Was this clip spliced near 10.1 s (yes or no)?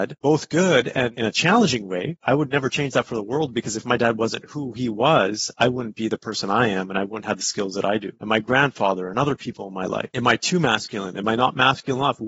yes